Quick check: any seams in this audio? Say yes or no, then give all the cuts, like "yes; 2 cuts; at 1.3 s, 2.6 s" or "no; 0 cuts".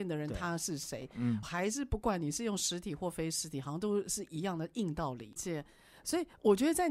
yes; 2 cuts; at 1.4 s, 5.4 s